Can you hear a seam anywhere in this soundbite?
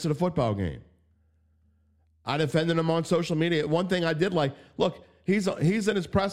no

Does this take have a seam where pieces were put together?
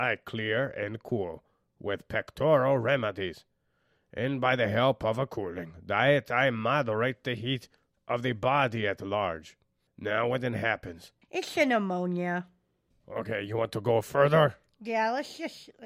yes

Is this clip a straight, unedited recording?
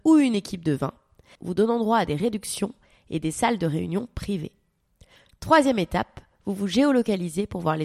no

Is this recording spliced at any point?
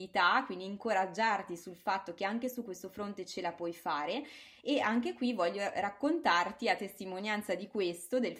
no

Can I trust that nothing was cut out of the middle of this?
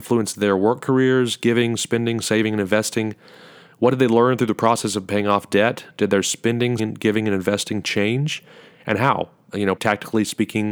no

